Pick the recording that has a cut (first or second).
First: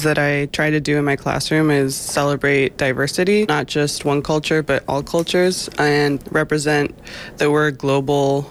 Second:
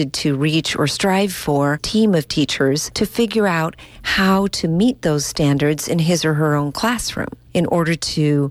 second